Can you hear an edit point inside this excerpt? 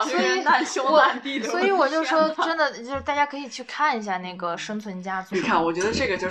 yes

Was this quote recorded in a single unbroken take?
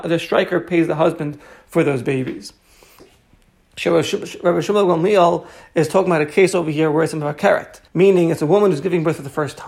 no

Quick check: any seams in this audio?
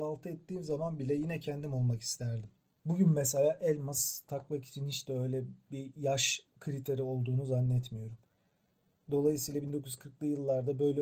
yes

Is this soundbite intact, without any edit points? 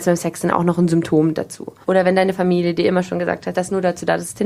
no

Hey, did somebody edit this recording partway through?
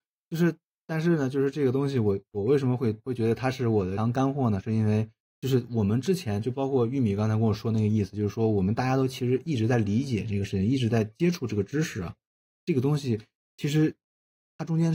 no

